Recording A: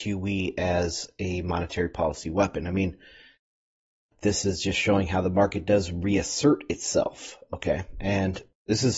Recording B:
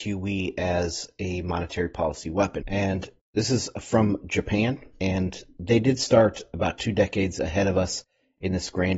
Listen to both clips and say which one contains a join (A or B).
B